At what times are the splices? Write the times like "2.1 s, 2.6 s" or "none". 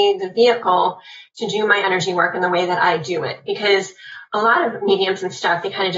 none